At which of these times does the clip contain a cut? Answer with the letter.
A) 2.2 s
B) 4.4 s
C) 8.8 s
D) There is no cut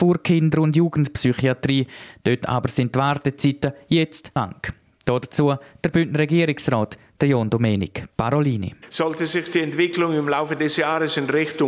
B